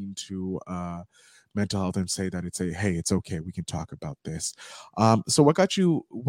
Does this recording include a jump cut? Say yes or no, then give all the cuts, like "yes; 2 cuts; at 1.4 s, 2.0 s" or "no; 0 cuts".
no; 0 cuts